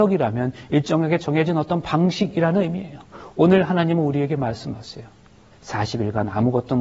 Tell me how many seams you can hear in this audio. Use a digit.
1